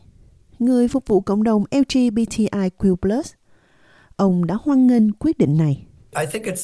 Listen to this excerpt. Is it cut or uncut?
uncut